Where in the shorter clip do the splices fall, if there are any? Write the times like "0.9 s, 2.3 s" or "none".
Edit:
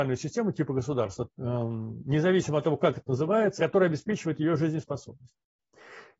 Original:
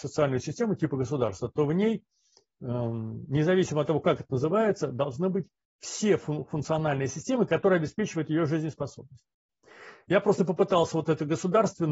1.3 s, 3.6 s